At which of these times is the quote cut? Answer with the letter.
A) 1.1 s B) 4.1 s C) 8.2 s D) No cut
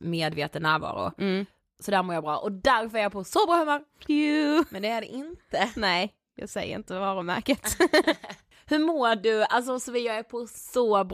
B